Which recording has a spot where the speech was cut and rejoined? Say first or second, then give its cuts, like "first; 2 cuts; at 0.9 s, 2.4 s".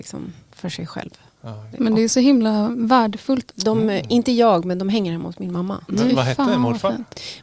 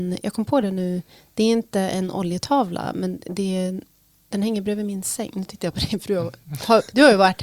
first; 3 cuts; at 1.7 s, 3.5 s, 5.9 s